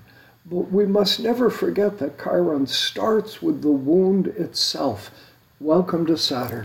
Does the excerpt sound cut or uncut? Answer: cut